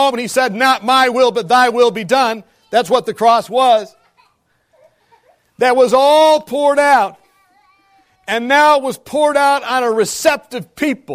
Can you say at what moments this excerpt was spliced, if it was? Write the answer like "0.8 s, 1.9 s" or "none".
none